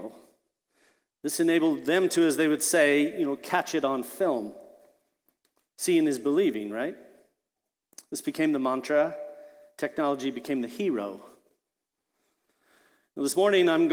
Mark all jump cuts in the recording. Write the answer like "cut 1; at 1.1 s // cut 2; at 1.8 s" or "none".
none